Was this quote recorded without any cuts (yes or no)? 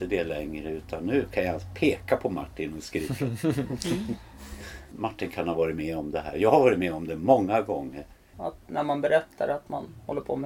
no